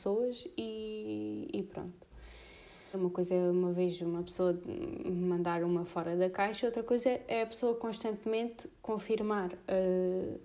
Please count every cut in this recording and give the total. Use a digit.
1